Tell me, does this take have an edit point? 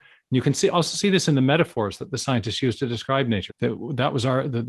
yes; 1 cut; at 3.5 s

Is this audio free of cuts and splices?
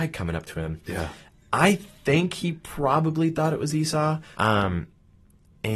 no; 1 cut; at 4.3 s

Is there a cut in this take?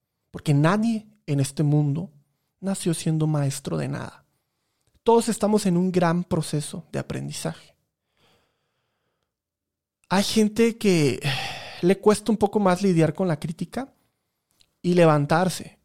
no; 0 cuts

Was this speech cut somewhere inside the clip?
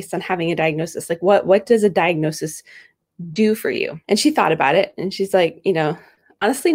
yes; 1 cut; at 4.0 s

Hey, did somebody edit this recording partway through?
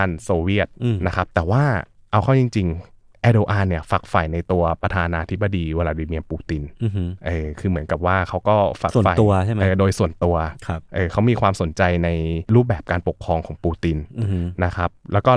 no; 0 cuts

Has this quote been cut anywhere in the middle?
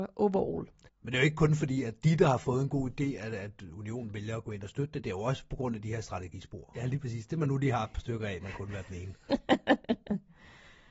yes; 1 cut; at 6.7 s

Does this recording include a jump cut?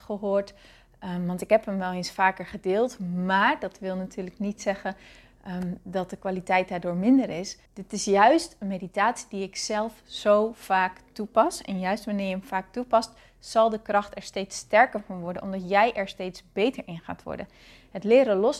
yes; 1 cut; at 7.7 s

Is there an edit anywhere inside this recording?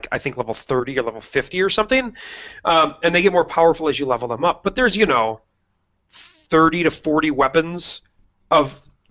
no; 0 cuts

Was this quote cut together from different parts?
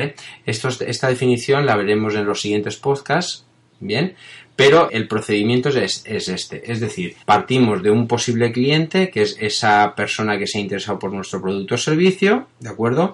yes; 2 cuts; at 4.9 s, 7.2 s

